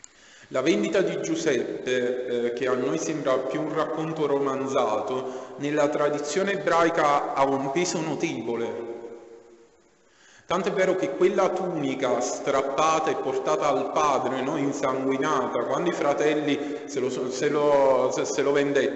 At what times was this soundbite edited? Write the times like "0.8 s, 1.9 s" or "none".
none